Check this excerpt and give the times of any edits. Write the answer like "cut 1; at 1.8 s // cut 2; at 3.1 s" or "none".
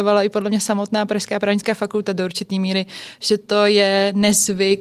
none